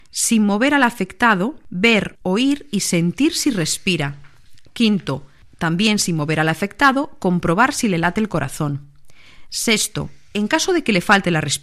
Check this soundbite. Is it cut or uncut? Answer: uncut